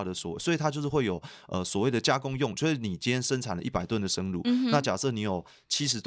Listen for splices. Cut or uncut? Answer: uncut